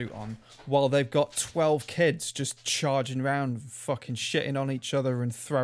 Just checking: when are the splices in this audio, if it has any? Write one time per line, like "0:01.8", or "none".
none